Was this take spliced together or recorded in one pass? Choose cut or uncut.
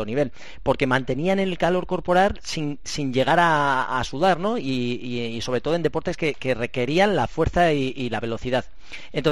uncut